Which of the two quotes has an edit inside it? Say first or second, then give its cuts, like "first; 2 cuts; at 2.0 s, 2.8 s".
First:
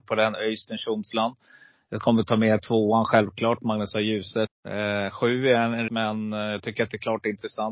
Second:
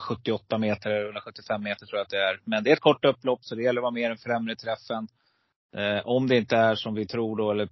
first; 2 cuts; at 4.5 s, 5.9 s